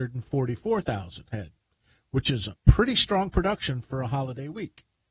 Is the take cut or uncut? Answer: uncut